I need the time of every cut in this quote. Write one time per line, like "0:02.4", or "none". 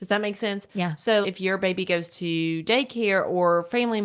0:01.2